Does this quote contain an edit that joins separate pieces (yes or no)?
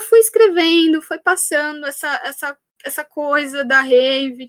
no